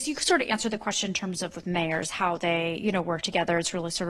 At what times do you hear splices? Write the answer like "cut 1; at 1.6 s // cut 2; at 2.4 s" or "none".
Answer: none